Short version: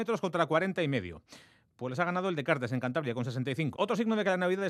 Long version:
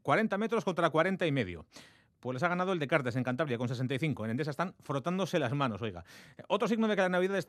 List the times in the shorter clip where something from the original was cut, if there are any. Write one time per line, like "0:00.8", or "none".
0:03.7